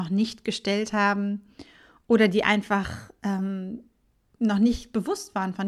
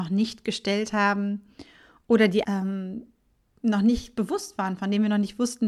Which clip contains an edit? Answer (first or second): second